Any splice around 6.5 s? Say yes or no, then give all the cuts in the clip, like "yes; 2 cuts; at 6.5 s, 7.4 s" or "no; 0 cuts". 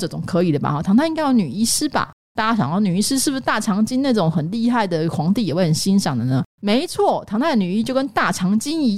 no; 1 cut; at 2.4 s